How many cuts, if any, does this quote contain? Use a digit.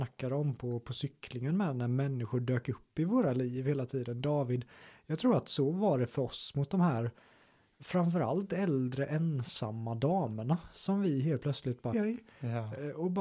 1